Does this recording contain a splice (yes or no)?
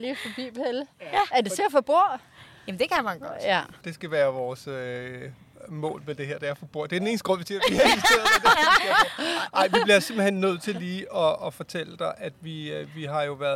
no